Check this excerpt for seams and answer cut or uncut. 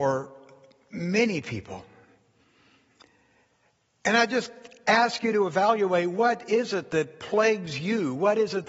uncut